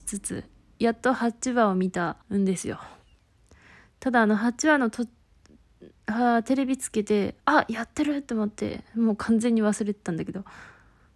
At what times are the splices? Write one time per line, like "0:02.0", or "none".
0:02.2
0:07.4